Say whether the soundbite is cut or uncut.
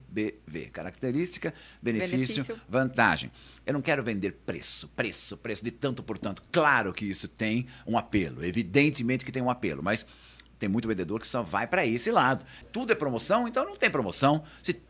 cut